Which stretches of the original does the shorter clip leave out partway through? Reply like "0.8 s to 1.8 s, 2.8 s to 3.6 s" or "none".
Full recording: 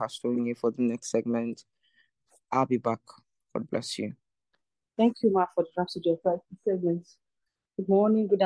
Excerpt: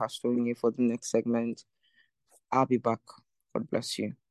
none